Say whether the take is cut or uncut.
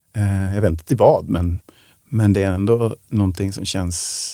uncut